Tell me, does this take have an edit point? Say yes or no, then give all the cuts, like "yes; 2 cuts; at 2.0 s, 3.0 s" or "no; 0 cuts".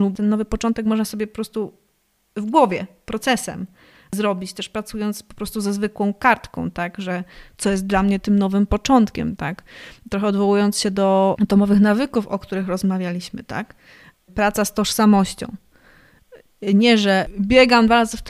no; 0 cuts